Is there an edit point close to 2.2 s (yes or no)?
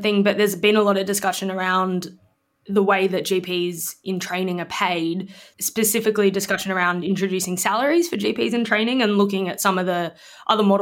no